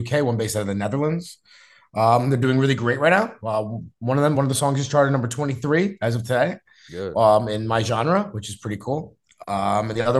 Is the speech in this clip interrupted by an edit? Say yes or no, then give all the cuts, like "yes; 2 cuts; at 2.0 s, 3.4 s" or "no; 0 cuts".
no; 0 cuts